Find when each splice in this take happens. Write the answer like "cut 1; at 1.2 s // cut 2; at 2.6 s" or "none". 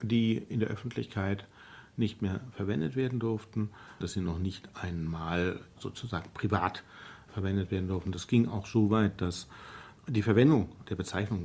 cut 1; at 4.0 s